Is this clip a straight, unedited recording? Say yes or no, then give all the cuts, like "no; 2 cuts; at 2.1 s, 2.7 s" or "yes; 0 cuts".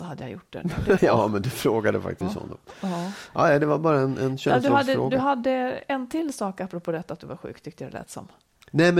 no; 2 cuts; at 1.0 s, 2.2 s